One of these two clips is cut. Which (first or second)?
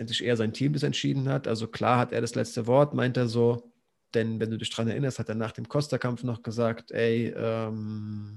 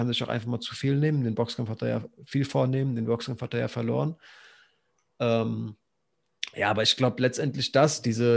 first